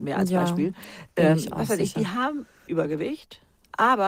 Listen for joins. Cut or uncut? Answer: cut